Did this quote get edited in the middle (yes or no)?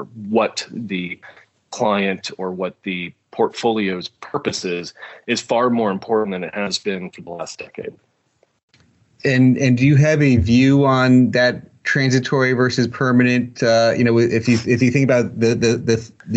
no